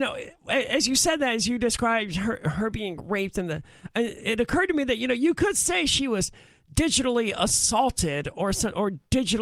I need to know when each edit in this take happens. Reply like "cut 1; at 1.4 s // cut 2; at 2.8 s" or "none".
none